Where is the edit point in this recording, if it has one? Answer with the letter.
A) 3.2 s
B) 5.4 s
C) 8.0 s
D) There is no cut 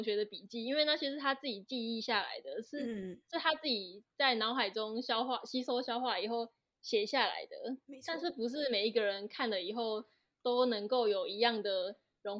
D